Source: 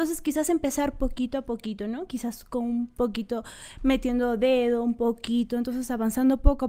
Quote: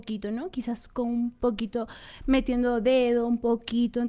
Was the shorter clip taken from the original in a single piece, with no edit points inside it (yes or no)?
yes